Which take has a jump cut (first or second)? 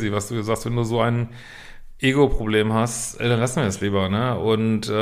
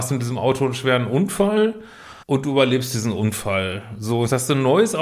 second